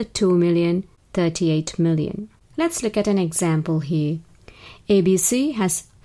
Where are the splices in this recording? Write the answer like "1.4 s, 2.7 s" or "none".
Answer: 2.5 s